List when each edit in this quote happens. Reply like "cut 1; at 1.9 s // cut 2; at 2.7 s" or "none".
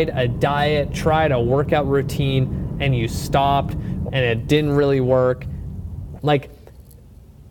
cut 1; at 4.1 s // cut 2; at 6.2 s